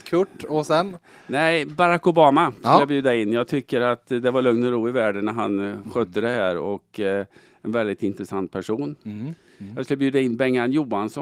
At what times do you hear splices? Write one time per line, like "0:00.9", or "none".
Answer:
none